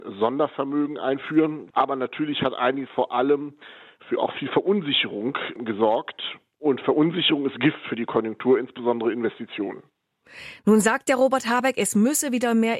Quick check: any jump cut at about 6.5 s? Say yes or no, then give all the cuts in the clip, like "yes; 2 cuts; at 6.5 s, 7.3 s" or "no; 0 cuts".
no; 2 cuts; at 1.7 s, 2.9 s